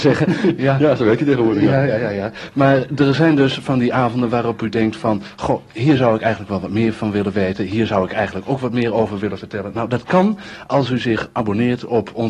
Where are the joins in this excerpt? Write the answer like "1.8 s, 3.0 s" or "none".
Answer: none